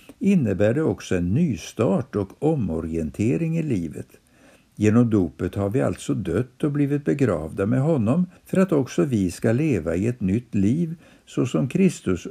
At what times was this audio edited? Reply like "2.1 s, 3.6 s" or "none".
8.4 s